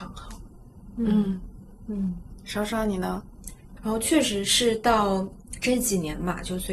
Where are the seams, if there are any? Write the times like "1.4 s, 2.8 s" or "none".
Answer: 3.8 s